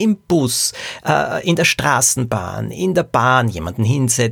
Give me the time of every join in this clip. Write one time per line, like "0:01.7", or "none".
none